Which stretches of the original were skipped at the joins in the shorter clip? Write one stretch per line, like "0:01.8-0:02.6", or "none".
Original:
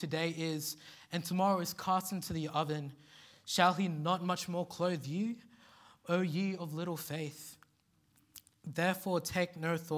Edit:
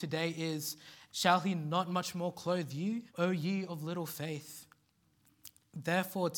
0:01.1-0:03.4
0:05.4-0:06.0

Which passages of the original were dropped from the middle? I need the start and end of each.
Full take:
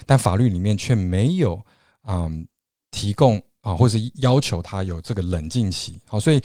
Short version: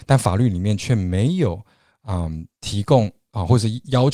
0:02.5-0:02.8

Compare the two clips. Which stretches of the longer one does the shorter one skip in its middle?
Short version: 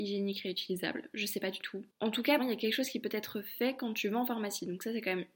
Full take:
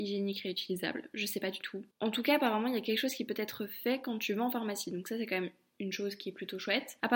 0:02.4-0:02.6

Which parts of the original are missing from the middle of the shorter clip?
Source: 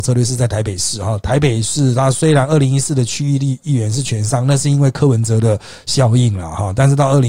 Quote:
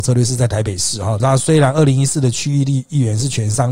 0:01.2-0:01.9

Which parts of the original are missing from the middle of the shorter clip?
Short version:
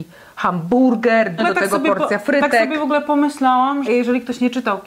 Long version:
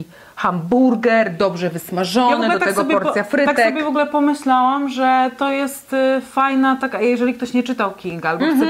0:01.4-0:02.4
0:04.9-0:07.0

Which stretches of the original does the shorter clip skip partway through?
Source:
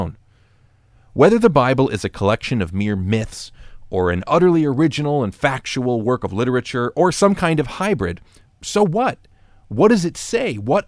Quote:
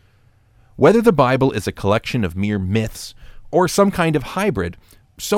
0:03.9-0:06.9

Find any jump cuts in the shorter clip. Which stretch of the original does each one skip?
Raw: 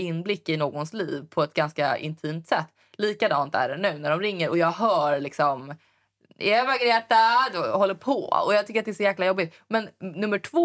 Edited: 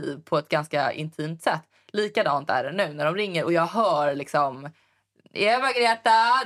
none

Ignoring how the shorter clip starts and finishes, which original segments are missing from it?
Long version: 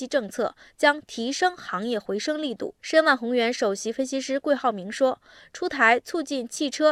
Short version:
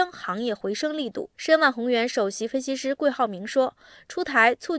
none

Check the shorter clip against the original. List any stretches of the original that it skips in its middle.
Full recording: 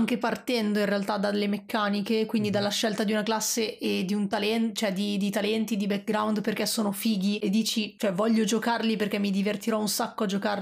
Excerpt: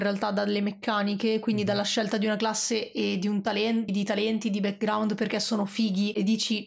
0:04.7-0:05.1

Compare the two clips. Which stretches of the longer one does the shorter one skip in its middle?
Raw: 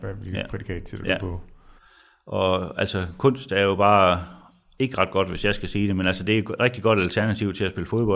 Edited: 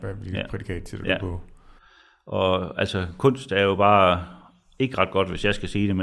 none

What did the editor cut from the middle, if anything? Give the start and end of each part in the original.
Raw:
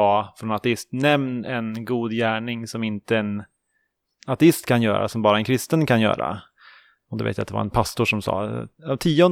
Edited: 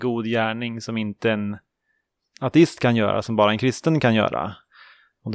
none

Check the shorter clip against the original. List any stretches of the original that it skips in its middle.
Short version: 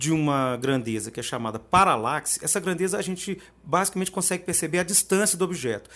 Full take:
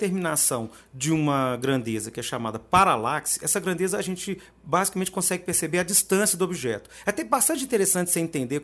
none

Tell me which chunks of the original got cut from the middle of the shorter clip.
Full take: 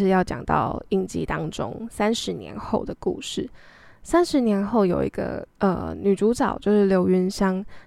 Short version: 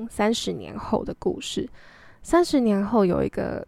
none

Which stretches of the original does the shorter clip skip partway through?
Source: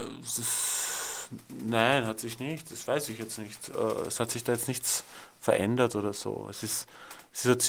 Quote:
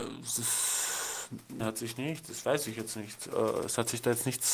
0:01.6-0:02.0

